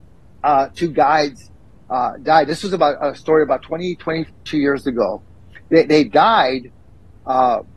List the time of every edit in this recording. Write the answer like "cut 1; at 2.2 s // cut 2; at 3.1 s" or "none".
none